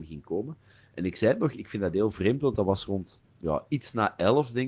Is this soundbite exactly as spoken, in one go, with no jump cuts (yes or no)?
no